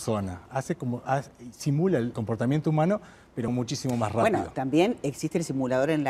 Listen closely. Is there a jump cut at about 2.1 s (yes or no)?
yes